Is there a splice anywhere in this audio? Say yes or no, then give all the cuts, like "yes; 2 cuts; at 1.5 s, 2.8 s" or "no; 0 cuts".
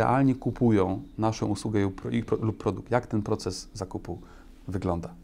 no; 0 cuts